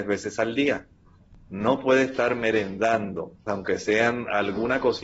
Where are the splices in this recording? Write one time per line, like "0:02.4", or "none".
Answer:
0:03.5